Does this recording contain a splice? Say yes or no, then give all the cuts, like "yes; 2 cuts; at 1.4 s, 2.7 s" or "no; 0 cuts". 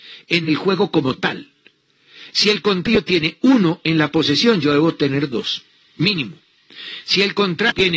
yes; 1 cut; at 2.3 s